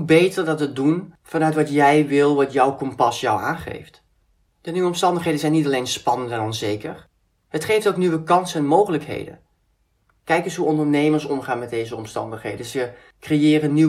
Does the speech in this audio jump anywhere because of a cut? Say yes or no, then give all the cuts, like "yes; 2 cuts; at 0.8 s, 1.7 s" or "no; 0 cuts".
no; 0 cuts